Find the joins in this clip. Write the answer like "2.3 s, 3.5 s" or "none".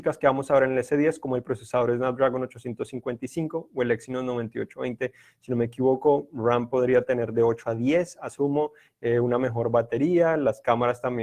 none